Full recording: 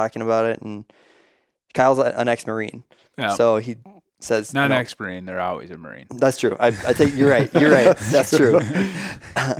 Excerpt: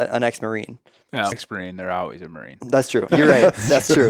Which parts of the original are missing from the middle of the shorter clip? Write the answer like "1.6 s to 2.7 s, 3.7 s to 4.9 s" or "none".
3.4 s to 4.8 s, 6.6 s to 7.5 s